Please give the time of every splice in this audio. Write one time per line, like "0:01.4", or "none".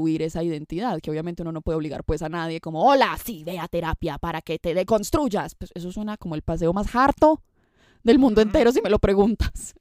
none